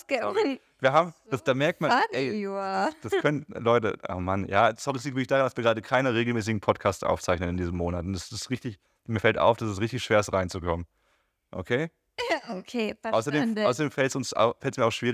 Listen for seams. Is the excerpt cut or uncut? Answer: uncut